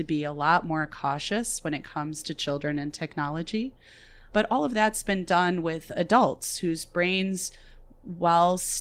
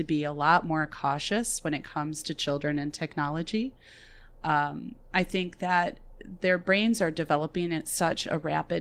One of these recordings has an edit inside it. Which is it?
first; 1 cut; at 4.3 s

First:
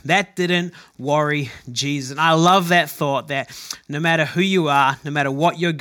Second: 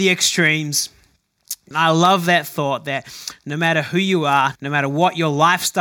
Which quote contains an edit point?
second; 2 cuts; at 1.7 s, 4.6 s

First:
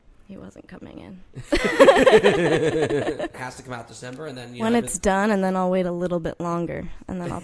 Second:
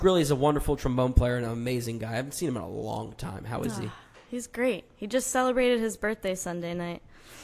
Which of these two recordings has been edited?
first; 1 cut; at 3.3 s

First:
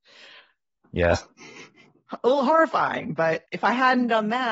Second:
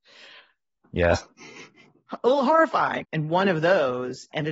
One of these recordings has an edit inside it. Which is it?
second; 1 cut; at 3.0 s

